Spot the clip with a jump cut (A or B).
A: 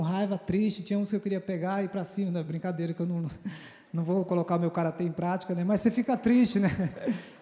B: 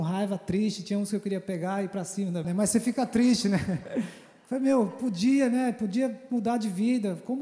B